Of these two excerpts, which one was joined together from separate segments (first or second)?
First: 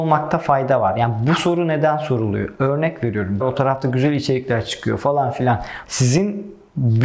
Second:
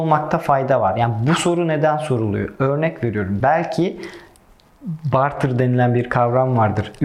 first